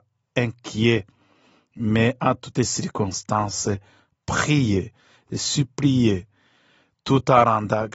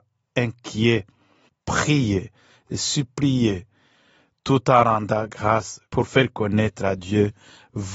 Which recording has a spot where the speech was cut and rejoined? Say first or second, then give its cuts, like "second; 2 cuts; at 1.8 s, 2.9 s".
second; 2 cuts; at 1.5 s, 5.9 s